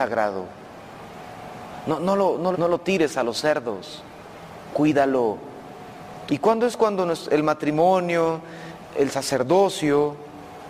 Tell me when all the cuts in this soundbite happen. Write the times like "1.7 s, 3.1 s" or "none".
2.5 s, 6.3 s